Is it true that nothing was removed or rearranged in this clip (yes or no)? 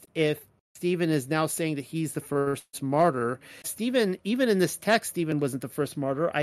no